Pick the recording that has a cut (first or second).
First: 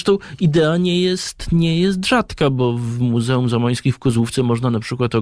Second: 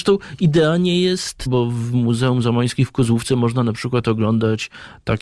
second